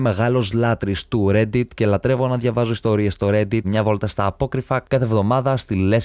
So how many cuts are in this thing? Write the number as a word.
one